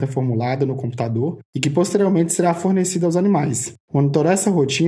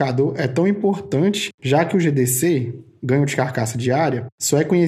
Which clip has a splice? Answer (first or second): first